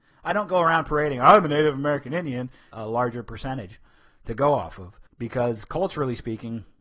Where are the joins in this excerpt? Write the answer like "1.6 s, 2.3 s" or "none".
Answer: 2.7 s, 5.1 s